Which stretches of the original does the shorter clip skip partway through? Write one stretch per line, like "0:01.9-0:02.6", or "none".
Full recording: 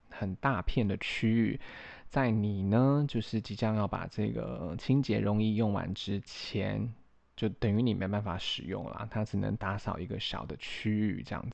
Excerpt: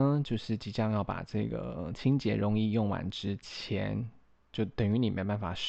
none